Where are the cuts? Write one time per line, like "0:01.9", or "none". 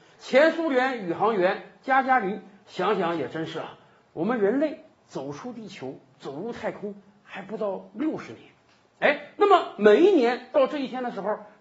0:02.6